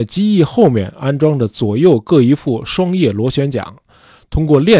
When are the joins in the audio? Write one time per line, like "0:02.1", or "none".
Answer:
none